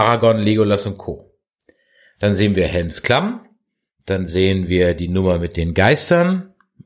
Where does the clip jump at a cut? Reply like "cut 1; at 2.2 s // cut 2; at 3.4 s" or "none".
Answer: none